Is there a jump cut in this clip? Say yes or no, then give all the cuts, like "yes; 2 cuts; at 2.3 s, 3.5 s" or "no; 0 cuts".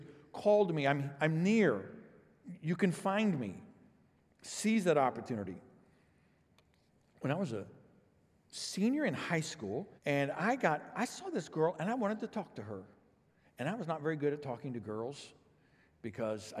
yes; 1 cut; at 10.0 s